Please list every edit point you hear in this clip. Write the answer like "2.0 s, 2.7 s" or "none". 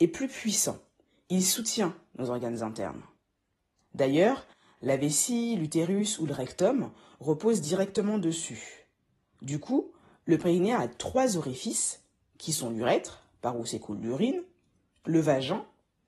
none